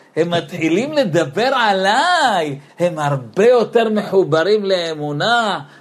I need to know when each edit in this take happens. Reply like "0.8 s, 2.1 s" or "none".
2.7 s